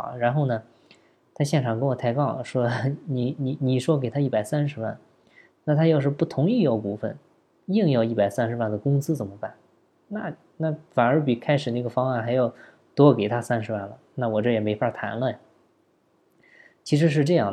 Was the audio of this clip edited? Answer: no; 0 cuts

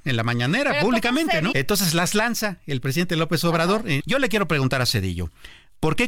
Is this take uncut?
no; 2 cuts; at 1.5 s, 4.0 s

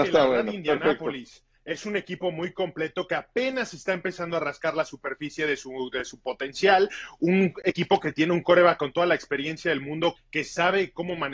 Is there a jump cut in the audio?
yes; 1 cut; at 10.2 s

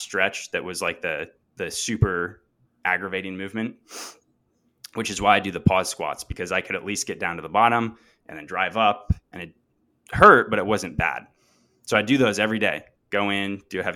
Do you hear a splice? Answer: no; 0 cuts

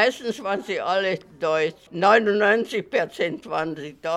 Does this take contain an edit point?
no; 0 cuts

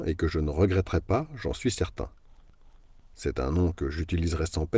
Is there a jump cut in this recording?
no; 0 cuts

